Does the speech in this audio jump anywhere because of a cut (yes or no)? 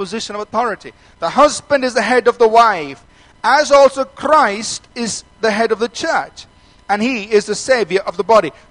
no